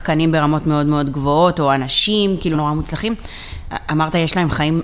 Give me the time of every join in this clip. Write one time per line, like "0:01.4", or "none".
0:02.5